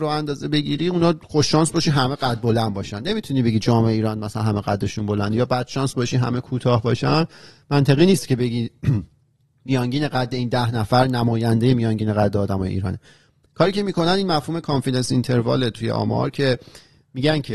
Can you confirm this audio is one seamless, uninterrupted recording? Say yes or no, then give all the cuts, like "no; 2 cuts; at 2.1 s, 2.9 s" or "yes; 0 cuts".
yes; 0 cuts